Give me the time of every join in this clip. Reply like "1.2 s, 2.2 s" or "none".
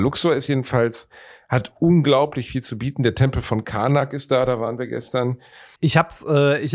5.8 s